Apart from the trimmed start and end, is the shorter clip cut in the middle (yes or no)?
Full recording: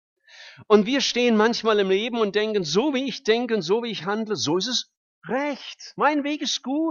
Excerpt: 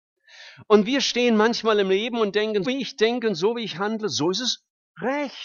yes